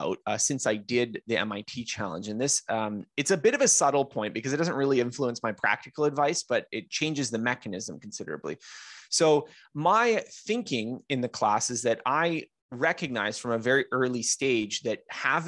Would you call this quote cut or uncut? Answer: uncut